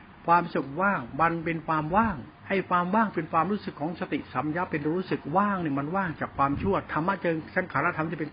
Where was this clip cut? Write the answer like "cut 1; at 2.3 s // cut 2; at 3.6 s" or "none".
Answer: cut 1; at 2.4 s